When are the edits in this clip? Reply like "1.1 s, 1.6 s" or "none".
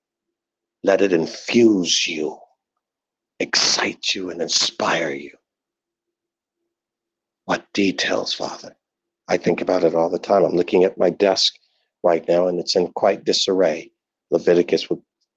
none